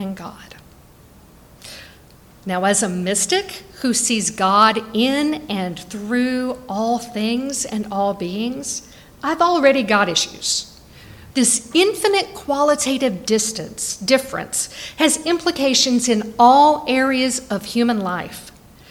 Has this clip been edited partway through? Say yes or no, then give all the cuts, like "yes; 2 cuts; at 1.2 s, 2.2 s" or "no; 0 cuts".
yes; 1 cut; at 11.3 s